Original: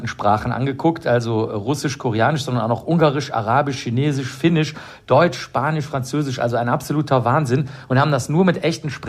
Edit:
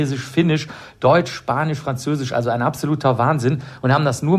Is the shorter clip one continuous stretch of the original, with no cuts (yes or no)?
yes